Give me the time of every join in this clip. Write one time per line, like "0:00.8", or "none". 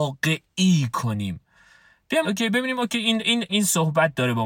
0:02.2
0:03.5